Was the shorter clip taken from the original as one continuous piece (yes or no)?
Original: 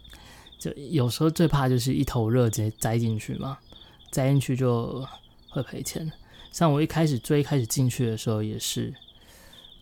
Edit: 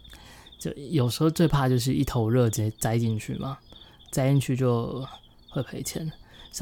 yes